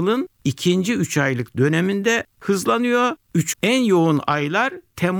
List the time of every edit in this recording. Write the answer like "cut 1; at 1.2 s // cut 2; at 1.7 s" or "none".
cut 1; at 3.5 s